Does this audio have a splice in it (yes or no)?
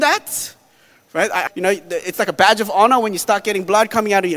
yes